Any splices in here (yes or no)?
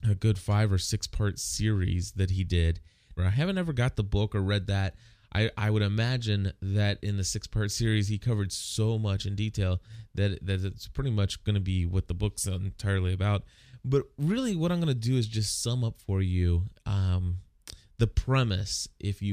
yes